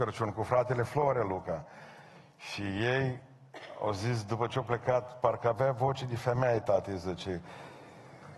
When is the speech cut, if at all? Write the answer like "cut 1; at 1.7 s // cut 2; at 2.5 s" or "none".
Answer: none